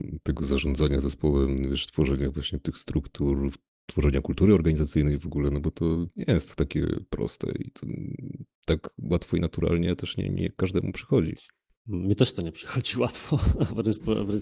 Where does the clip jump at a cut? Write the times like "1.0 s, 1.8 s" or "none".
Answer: none